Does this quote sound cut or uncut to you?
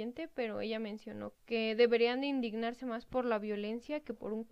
cut